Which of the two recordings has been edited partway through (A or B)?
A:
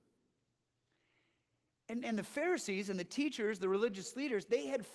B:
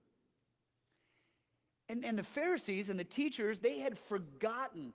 B